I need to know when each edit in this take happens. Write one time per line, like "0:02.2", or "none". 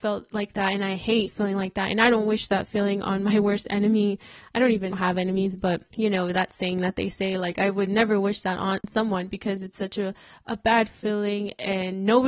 none